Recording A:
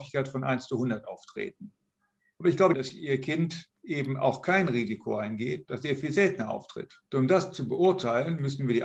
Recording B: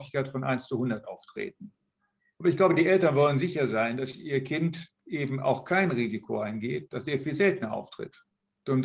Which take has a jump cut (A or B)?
A